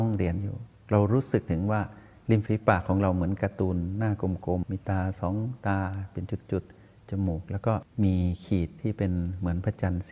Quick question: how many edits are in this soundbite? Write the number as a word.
one